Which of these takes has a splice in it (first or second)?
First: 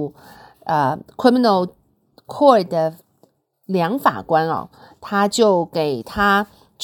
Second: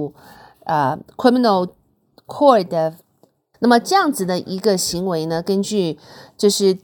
second